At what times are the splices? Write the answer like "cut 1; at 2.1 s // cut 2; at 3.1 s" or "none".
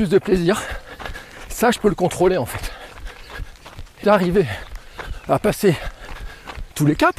cut 1; at 4.0 s